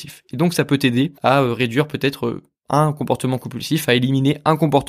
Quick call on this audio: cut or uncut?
cut